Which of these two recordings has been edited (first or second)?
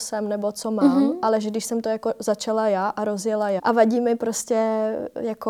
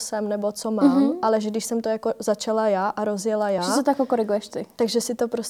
first